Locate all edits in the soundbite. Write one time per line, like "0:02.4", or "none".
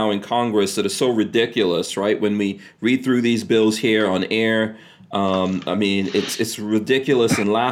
none